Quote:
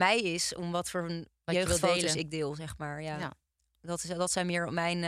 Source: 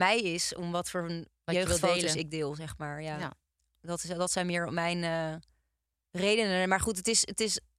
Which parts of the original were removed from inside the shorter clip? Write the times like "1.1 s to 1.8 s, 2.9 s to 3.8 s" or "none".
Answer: none